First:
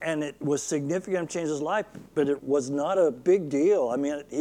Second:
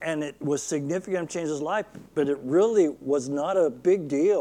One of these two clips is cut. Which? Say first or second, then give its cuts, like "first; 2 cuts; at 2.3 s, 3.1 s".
first; 1 cut; at 2.4 s